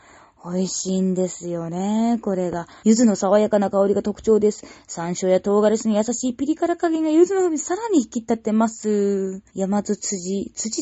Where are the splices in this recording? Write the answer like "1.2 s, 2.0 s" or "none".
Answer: 2.8 s, 9.5 s